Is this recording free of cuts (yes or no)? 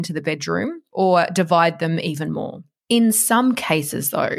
yes